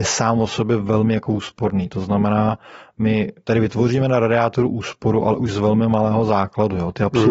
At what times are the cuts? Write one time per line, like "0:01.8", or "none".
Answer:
none